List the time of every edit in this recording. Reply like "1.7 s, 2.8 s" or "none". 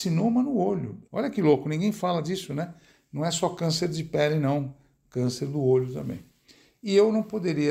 1.0 s